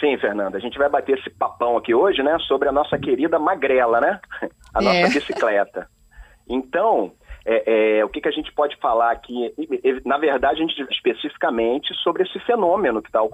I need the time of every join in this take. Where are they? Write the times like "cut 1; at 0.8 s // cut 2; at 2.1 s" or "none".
cut 1; at 10.9 s